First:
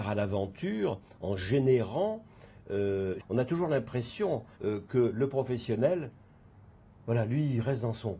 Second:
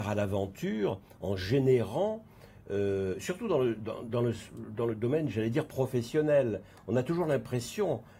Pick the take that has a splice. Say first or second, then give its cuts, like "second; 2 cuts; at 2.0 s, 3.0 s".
first; 2 cuts; at 3.2 s, 4.6 s